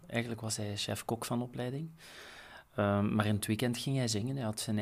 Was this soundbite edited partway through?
no; 0 cuts

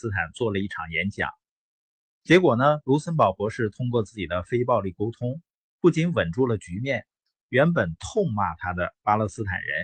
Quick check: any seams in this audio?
yes; 2 cuts; at 2.1 s, 7.3 s

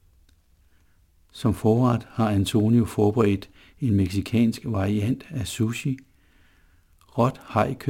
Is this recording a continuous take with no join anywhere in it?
yes; 0 cuts

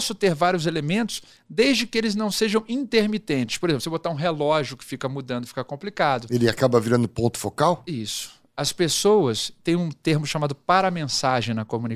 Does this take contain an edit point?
no; 0 cuts

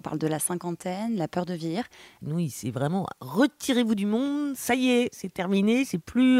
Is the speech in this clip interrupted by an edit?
yes; 1 cut; at 2.2 s

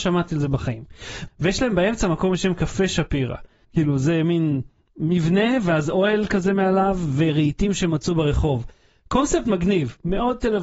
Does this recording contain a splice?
yes; 2 cuts; at 1.3 s, 3.6 s

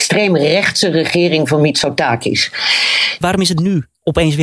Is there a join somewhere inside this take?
yes; 1 cut; at 3.2 s

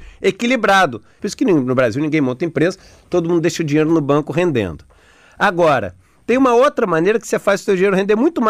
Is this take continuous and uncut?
no; 1 cut; at 1.2 s

